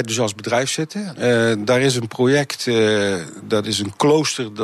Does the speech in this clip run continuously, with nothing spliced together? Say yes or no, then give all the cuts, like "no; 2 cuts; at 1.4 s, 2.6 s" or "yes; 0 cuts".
yes; 0 cuts